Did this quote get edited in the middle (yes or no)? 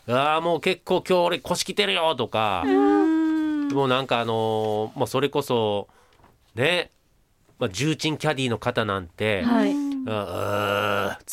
no